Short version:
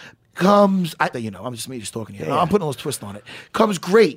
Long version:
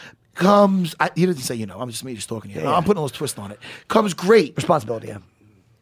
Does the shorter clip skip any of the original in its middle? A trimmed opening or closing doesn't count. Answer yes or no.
yes